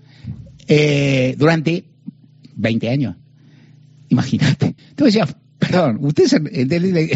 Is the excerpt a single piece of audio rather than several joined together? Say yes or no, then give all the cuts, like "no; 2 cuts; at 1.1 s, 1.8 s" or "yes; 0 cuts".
no; 1 cut; at 4.8 s